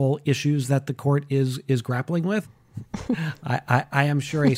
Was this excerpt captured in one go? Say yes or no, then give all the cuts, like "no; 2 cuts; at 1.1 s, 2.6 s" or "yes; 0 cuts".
no; 1 cut; at 2.4 s